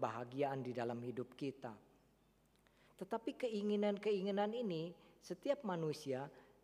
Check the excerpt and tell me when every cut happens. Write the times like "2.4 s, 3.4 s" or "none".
2.9 s